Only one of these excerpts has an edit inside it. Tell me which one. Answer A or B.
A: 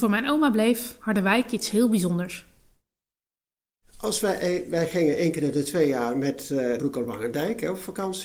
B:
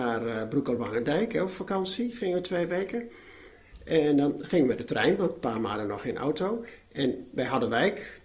A